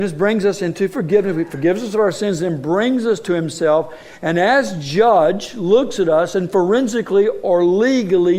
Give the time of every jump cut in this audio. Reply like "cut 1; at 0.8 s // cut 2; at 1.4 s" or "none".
none

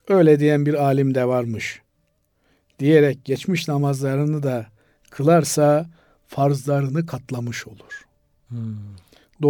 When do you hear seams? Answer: none

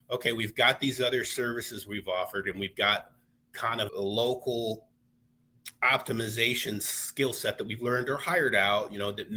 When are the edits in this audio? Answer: cut 1; at 2.4 s // cut 2; at 3.9 s

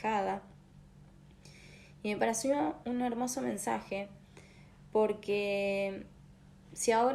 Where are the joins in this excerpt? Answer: cut 1; at 2.8 s

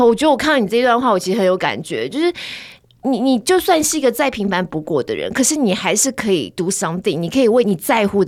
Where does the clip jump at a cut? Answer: none

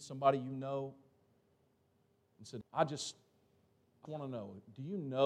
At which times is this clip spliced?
cut 1; at 2.6 s // cut 2; at 4.1 s

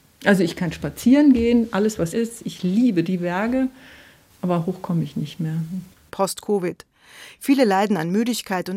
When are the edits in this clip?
cut 1; at 2.1 s // cut 2; at 6.1 s

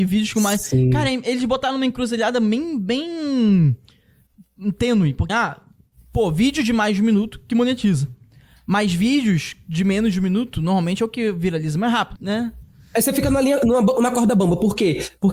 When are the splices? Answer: cut 1; at 5.3 s // cut 2; at 12.2 s

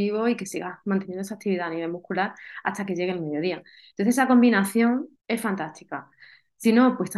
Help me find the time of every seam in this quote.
cut 1; at 5.2 s

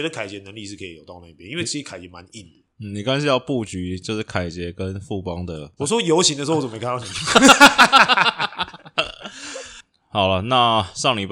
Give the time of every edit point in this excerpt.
cut 1; at 5.8 s

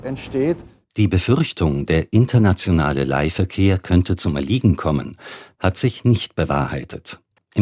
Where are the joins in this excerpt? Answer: cut 1; at 5.5 s

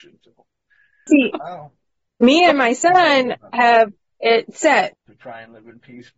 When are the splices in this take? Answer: cut 1; at 1.1 s // cut 2; at 4.9 s

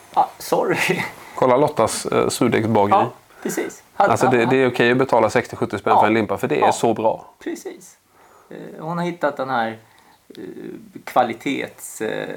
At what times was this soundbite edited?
none

